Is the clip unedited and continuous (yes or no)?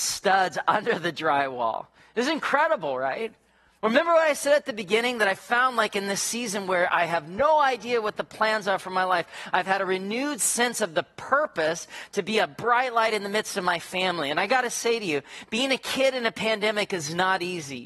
yes